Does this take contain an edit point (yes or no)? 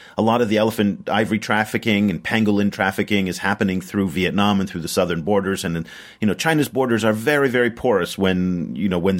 no